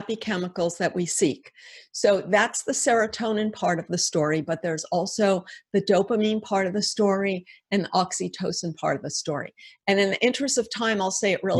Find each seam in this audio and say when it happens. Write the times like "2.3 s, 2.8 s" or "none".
none